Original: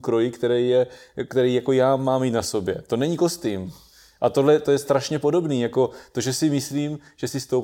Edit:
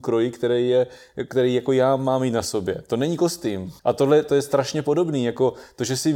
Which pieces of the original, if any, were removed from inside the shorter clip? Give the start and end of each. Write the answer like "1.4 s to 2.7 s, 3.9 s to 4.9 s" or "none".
3.8 s to 4.2 s

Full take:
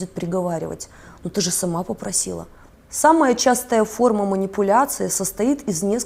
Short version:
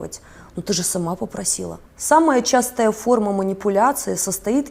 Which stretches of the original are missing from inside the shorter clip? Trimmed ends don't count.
2.5 s to 2.8 s

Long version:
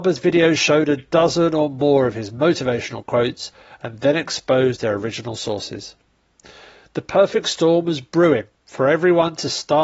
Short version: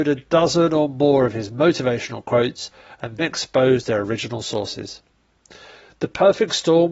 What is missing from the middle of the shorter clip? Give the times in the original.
4.0 s to 4.1 s

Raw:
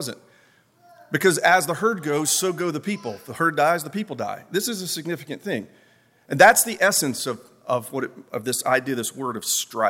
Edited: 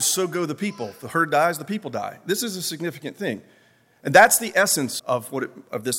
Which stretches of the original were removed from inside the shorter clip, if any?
7.2 s to 7.6 s

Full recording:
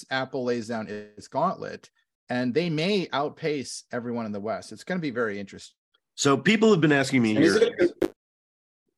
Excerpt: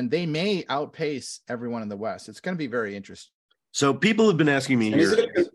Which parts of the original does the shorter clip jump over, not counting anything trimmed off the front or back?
none

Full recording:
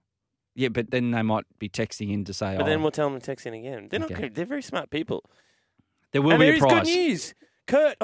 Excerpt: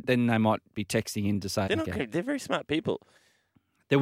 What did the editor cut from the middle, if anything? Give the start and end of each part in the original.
2.5 s to 3.9 s

